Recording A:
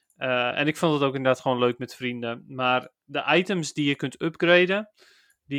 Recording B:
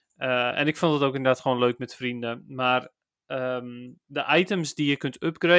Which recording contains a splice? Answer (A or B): A